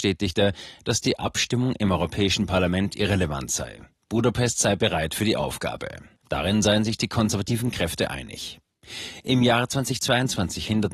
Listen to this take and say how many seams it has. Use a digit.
1